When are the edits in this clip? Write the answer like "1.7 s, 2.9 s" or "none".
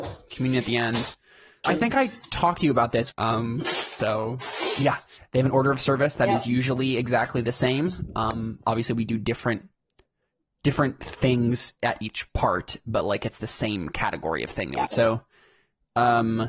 1.6 s, 3.1 s, 14.9 s